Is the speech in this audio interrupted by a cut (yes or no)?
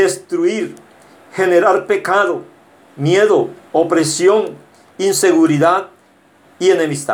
no